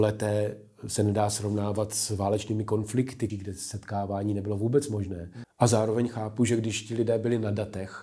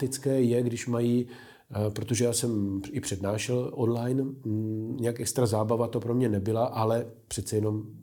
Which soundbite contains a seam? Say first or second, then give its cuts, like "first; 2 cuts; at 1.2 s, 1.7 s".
first; 2 cuts; at 3.3 s, 5.4 s